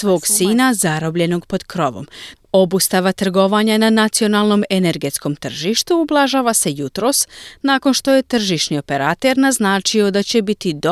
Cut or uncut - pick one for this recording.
cut